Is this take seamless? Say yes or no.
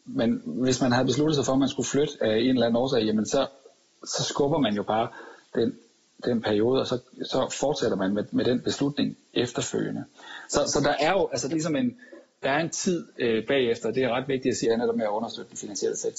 no